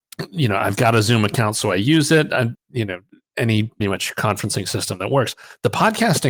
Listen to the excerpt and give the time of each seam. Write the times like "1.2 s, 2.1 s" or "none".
2.5 s, 3.8 s